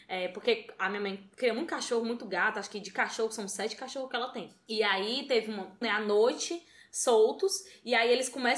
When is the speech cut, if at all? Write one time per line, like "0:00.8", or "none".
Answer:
0:05.8